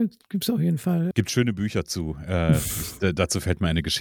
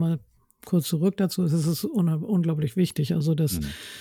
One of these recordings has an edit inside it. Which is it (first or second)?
first